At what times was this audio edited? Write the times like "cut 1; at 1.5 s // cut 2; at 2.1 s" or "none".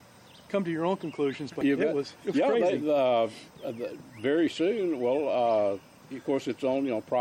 cut 1; at 1.6 s